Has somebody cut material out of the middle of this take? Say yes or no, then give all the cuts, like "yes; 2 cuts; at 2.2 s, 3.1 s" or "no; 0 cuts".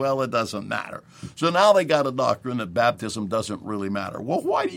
no; 0 cuts